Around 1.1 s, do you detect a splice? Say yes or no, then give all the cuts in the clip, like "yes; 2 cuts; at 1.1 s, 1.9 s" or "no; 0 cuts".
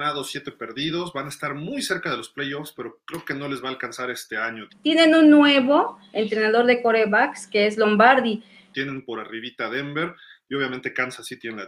no; 2 cuts; at 4.7 s, 8.7 s